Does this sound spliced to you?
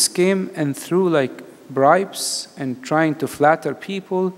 no; 0 cuts

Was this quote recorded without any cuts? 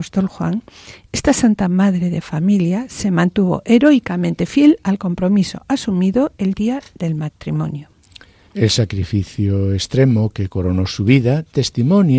yes; 0 cuts

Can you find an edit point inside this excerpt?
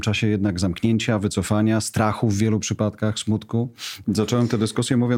yes; 1 cut; at 4.0 s

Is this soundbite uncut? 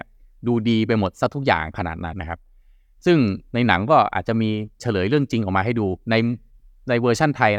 no; 1 cut; at 2.1 s

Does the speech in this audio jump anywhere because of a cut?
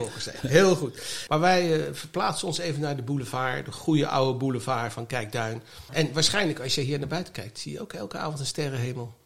yes; 2 cuts; at 1.3 s, 5.9 s

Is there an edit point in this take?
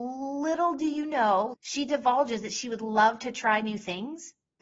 yes; 1 cut; at 1.5 s

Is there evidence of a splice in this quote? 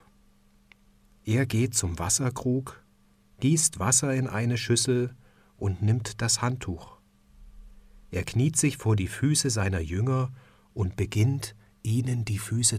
no; 0 cuts

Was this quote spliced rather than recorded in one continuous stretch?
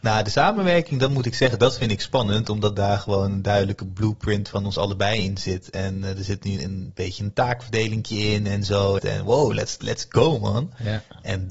yes; 2 cuts; at 6.6 s, 9.0 s

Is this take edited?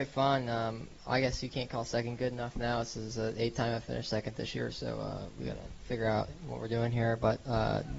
no; 0 cuts

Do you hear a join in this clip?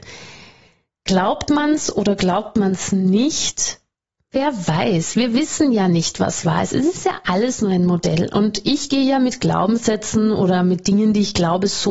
no; 0 cuts

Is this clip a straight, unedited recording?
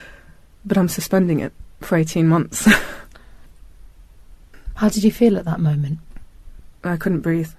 yes; 0 cuts

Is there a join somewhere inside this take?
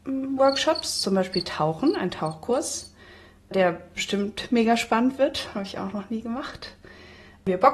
no; 0 cuts

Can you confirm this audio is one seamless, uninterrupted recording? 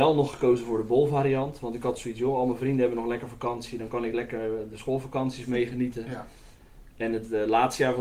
yes; 0 cuts

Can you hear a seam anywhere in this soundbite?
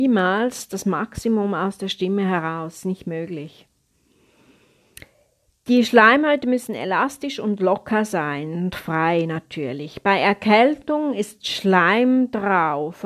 no; 0 cuts

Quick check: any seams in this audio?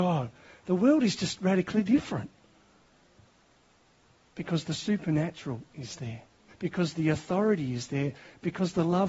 yes; 1 cut; at 6.5 s

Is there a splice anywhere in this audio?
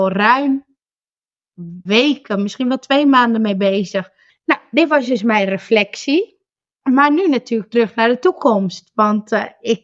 yes; 2 cuts; at 1.9 s, 4.3 s

